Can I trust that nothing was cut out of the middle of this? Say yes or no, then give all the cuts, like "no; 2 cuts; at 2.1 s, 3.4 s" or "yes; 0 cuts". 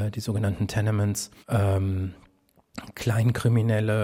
no; 1 cut; at 1.4 s